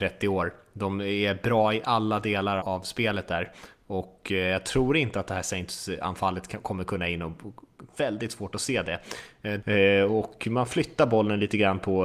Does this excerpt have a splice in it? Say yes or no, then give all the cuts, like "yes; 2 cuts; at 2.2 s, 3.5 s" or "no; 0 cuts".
yes; 3 cuts; at 2.6 s, 7.9 s, 9.6 s